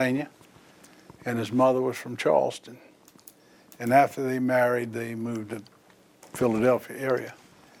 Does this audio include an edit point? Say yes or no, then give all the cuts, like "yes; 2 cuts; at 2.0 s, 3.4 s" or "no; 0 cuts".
no; 0 cuts